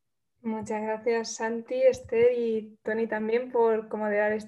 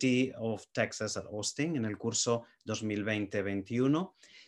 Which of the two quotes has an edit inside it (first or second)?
first